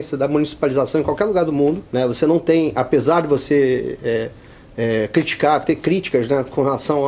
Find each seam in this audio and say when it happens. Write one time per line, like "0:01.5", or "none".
0:01.9